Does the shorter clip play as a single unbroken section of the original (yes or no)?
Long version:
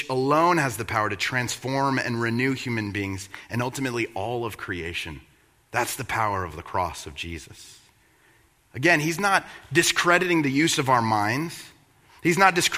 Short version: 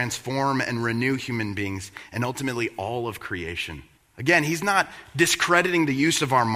no